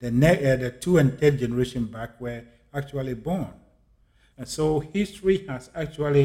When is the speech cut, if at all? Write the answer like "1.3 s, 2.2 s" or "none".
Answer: 4.3 s